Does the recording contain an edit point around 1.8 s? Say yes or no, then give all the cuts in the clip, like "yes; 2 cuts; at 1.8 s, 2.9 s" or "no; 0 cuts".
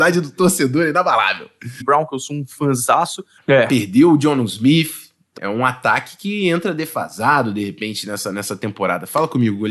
yes; 3 cuts; at 1.8 s, 3.4 s, 5.4 s